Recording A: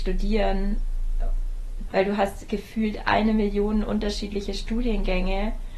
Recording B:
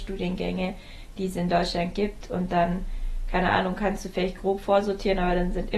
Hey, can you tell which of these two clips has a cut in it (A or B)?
A